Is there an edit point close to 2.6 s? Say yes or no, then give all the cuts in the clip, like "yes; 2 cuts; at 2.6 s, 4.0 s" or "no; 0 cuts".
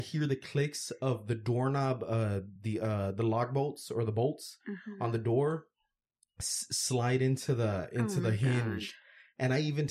no; 0 cuts